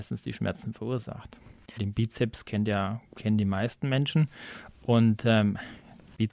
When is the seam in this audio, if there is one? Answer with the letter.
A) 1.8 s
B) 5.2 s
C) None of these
A